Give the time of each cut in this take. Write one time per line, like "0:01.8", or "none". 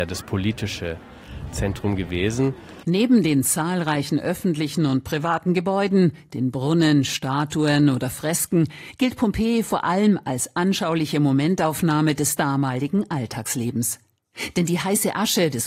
none